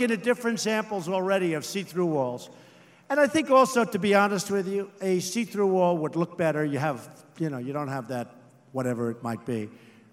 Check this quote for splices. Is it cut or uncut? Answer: uncut